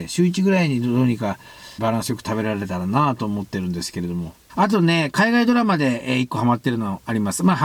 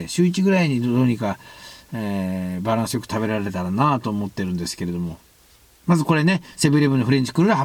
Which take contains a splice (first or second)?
first